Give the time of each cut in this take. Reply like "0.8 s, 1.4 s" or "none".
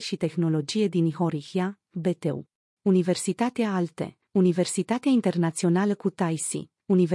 2.8 s